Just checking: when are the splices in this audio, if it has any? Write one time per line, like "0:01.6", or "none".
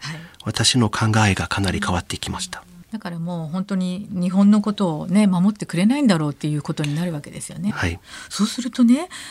0:07.7